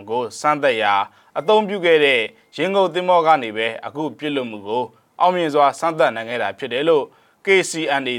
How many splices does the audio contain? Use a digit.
0